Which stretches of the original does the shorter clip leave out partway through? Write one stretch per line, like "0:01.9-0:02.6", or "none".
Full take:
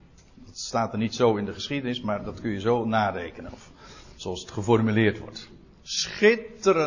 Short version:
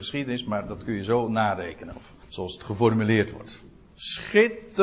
0:03.8-0:04.1